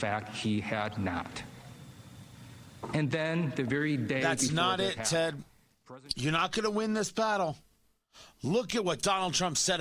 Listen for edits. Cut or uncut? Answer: uncut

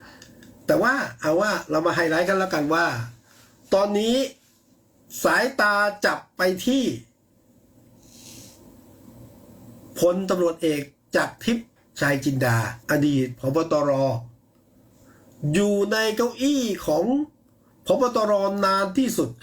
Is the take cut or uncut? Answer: cut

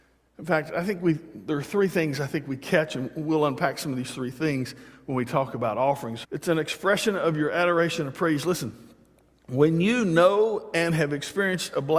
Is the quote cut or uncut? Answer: cut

